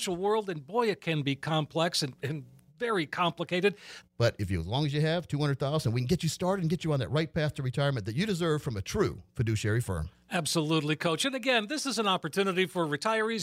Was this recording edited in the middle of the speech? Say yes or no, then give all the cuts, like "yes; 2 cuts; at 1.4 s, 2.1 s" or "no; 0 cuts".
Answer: yes; 1 cut; at 4.0 s